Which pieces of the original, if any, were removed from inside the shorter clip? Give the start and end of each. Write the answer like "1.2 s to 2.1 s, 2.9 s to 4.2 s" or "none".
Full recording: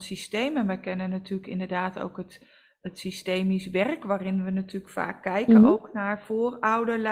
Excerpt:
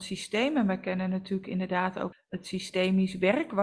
2.1 s to 2.6 s